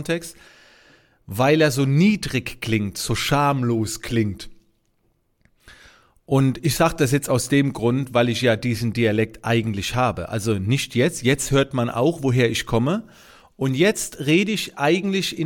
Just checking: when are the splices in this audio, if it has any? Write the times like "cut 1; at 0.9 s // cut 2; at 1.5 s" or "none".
none